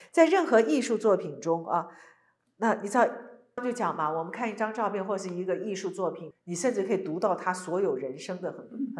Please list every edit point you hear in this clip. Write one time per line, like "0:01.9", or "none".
0:03.6
0:06.3